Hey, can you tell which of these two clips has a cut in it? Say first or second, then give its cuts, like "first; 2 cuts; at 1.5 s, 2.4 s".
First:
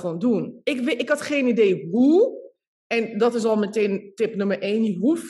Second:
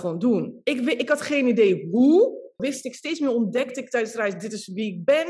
second; 1 cut; at 2.6 s